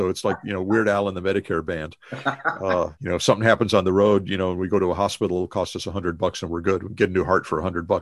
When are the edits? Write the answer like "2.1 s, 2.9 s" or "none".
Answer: 3.0 s

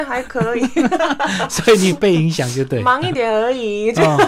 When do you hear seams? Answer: 1.0 s, 3.1 s

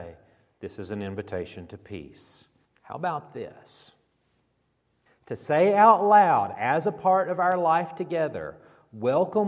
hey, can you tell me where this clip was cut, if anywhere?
2.6 s, 5.1 s

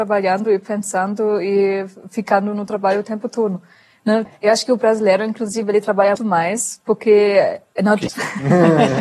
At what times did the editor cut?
4.3 s, 6.2 s, 8.1 s

